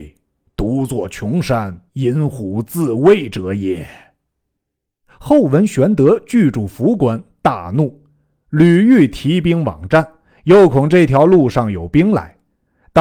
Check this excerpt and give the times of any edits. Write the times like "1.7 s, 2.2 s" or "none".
1.9 s